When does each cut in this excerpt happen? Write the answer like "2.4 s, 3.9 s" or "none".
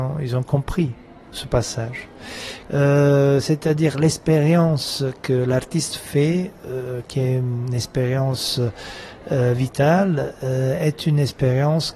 2.6 s